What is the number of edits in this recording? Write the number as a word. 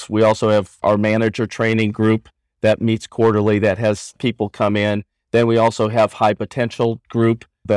zero